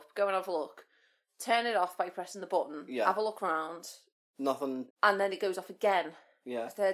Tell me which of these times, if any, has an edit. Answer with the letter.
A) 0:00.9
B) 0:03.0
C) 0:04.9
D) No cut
C